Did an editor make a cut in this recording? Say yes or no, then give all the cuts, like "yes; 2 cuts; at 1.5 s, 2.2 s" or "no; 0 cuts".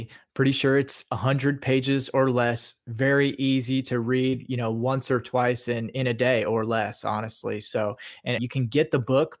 yes; 1 cut; at 8.4 s